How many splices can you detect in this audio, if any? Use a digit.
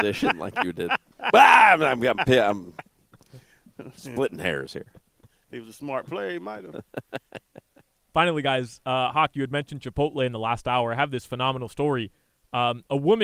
0